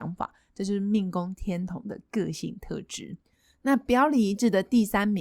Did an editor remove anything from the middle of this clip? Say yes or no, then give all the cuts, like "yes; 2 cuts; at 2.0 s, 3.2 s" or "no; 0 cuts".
no; 0 cuts